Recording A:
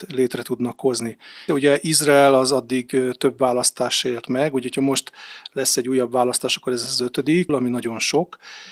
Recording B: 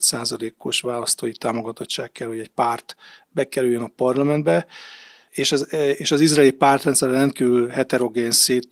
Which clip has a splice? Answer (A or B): A